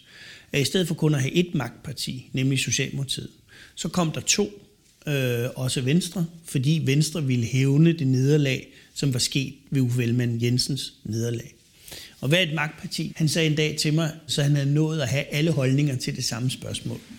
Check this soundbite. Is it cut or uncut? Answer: cut